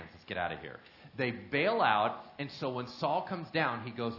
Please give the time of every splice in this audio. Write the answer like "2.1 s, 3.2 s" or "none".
none